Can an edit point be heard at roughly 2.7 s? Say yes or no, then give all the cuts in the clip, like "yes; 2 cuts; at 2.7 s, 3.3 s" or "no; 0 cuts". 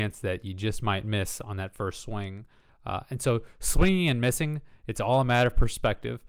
yes; 1 cut; at 2.7 s